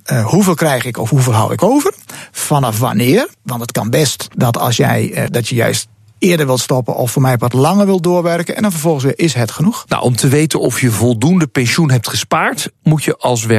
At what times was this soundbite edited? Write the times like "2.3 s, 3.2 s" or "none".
5.3 s